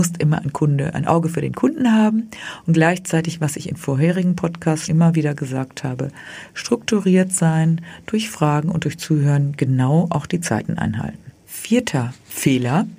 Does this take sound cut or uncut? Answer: cut